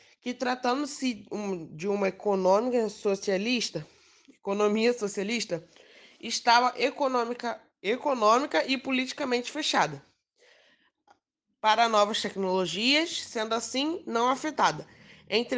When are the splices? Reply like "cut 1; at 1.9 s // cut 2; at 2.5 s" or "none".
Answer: none